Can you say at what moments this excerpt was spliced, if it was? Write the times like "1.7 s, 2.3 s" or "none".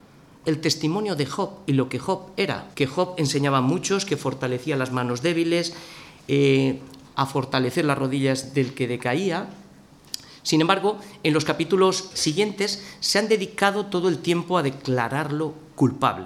2.7 s, 7.1 s